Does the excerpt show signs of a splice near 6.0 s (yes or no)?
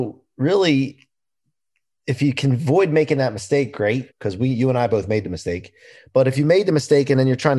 no